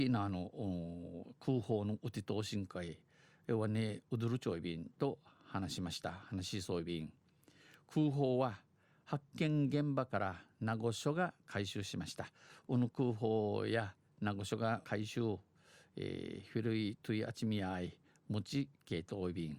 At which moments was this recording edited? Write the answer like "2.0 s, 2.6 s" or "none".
14.8 s